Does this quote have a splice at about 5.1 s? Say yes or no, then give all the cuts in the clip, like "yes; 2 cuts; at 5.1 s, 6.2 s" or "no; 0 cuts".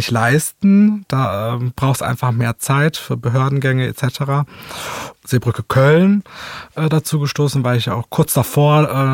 yes; 1 cut; at 5.1 s